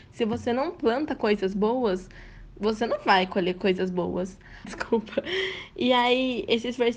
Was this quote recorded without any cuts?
no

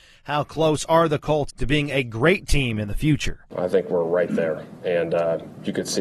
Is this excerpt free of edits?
no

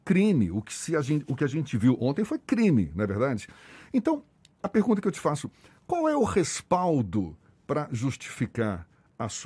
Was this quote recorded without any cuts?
yes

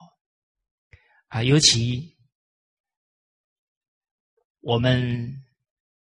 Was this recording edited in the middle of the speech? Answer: no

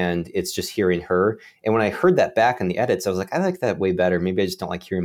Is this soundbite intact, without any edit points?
yes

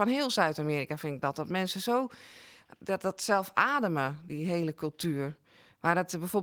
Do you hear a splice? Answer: yes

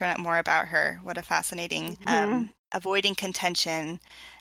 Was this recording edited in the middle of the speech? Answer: yes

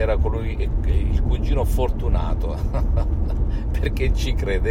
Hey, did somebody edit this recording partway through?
no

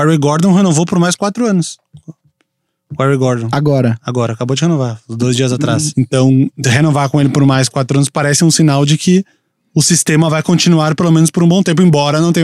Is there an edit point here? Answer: yes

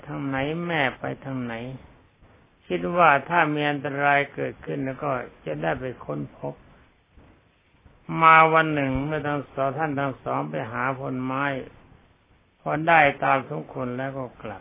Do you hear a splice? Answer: no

